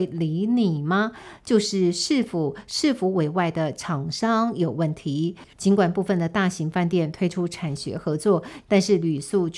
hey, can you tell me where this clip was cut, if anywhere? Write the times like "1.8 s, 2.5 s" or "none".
5.5 s, 8.6 s